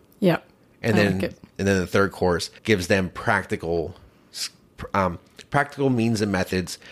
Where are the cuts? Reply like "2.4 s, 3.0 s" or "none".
2.6 s